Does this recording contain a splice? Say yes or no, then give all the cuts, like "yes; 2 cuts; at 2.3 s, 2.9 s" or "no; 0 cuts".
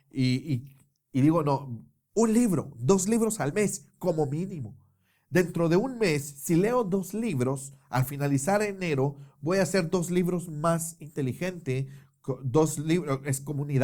no; 0 cuts